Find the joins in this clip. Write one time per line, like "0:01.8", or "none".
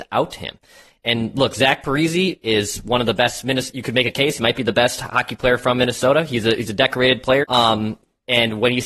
0:07.4